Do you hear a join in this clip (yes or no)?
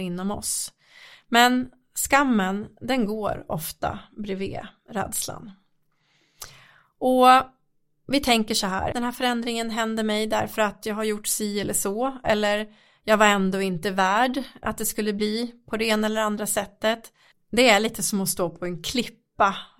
yes